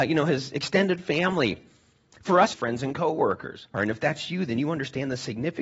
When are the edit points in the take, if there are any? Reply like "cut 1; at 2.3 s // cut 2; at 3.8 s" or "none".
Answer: cut 1; at 2.5 s // cut 2; at 3.7 s

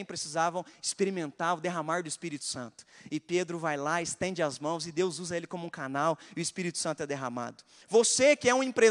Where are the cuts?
cut 1; at 7.8 s

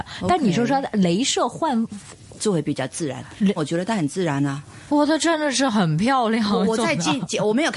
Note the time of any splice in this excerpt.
cut 1; at 2.4 s // cut 2; at 3.6 s

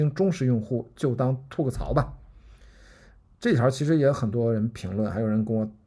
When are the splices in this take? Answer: none

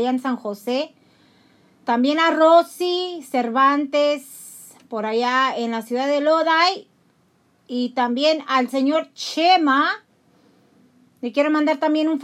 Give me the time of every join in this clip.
none

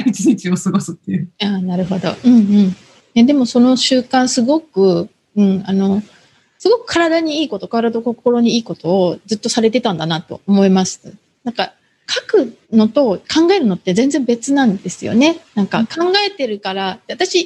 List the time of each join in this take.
cut 1; at 12.6 s

